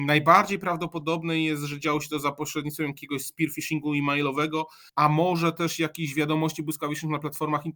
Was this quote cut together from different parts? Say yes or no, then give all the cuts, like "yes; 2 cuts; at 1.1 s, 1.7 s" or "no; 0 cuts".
yes; 1 cut; at 4.9 s